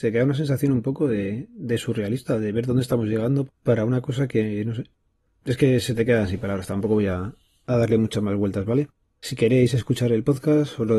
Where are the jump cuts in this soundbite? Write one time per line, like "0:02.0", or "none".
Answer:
0:03.5